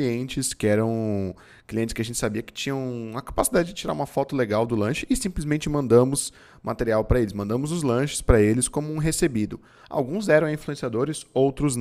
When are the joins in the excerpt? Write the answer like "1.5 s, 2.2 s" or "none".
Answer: none